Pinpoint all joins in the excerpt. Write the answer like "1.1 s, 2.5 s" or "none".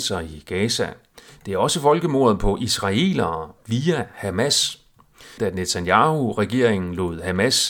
5.4 s